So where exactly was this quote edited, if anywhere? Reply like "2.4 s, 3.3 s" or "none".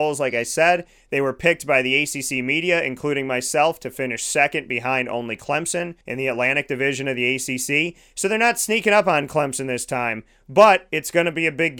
6.0 s